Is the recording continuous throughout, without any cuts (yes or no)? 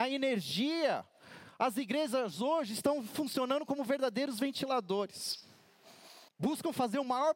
no